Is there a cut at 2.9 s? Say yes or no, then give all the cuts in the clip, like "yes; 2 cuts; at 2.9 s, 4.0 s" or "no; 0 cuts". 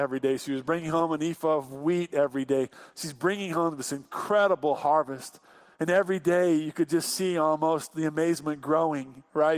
no; 0 cuts